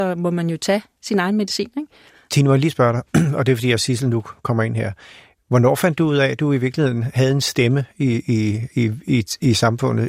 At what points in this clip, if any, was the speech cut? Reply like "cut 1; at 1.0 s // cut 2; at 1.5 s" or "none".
none